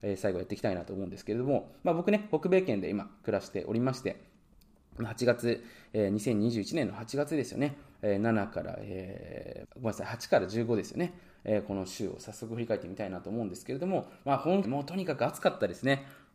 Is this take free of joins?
no; 2 cuts; at 9.6 s, 14.6 s

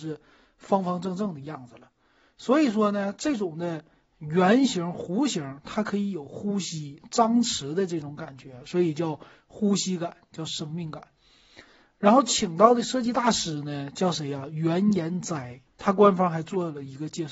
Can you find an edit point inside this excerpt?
yes; 1 cut; at 15.7 s

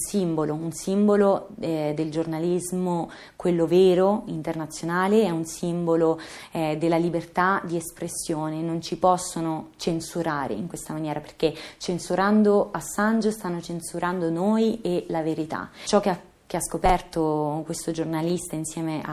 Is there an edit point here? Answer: no; 0 cuts

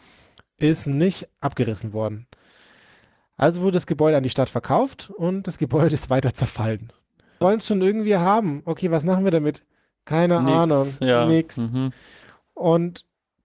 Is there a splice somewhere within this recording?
yes; 1 cut; at 7.4 s

